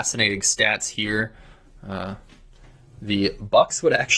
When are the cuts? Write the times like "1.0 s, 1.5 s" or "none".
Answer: none